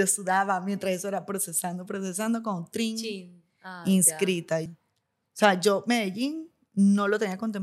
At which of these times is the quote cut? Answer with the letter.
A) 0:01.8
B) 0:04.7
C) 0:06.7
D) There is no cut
B